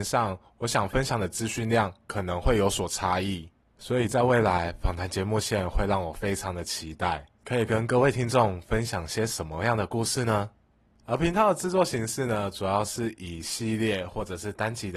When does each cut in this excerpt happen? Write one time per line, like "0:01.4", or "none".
0:03.7